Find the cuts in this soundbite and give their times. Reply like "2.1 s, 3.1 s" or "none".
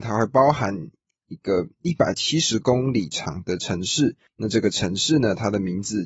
none

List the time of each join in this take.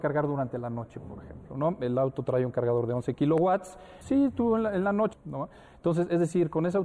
4.0 s, 5.1 s

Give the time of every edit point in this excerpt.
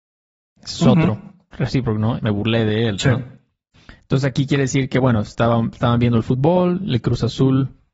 2.2 s

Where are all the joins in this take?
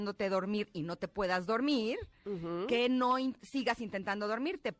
none

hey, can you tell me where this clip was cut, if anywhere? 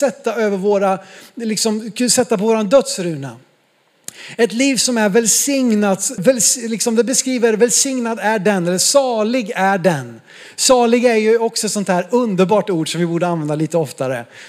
6.2 s

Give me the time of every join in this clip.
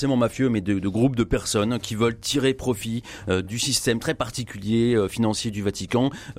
none

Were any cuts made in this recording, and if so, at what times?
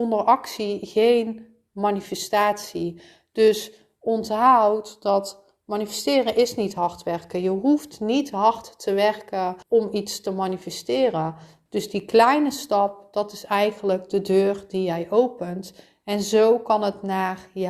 9.6 s, 11.7 s

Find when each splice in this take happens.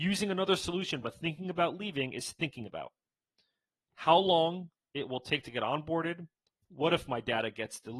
6.5 s

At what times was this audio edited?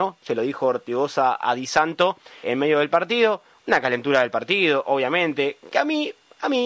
2.4 s

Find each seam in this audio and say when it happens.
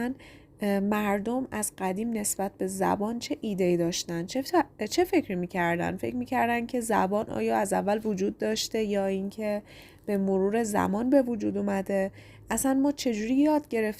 none

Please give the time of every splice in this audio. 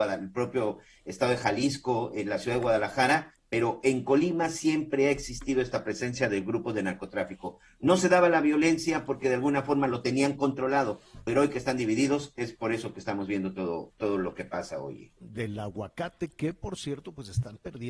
15.2 s

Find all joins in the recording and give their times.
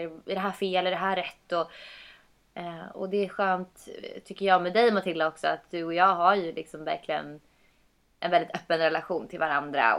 none

